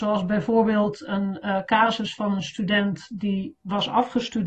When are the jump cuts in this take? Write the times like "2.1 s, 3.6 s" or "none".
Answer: none